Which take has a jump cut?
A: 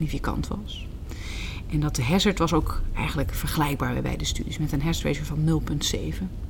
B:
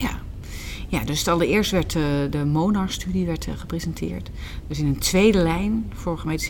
B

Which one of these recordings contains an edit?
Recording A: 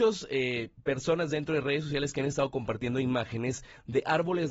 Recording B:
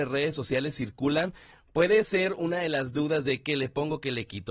B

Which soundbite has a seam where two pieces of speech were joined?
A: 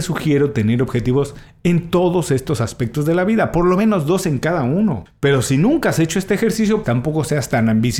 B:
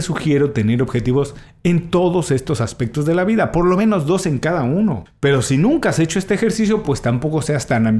A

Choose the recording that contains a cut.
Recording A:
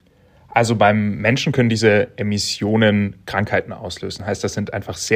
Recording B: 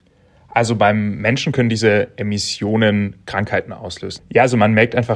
B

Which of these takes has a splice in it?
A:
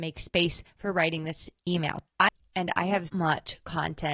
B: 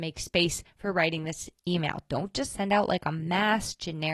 A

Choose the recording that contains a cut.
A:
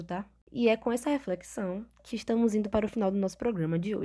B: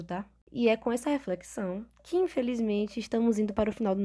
A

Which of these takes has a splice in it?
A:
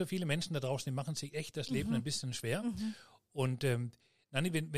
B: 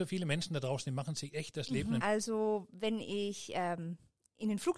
B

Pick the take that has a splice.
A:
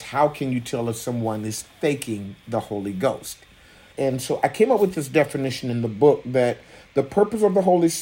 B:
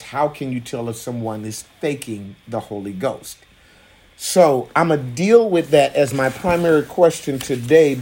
A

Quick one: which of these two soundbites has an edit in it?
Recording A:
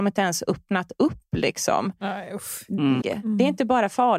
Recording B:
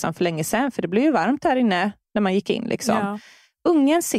A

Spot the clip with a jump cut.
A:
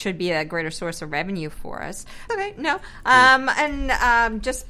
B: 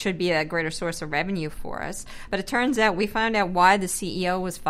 A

